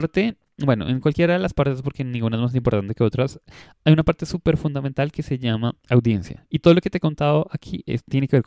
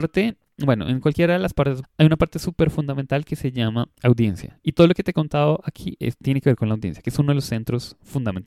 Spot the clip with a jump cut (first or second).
second